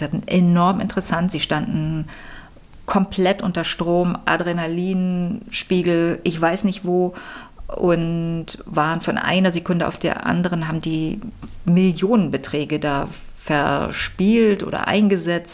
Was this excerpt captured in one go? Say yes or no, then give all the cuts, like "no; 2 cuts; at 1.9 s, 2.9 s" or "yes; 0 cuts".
yes; 0 cuts